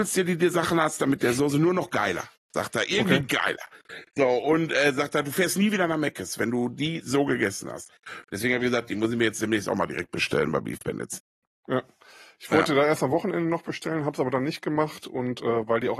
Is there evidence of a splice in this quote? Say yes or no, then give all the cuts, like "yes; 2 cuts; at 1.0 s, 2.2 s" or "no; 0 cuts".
no; 0 cuts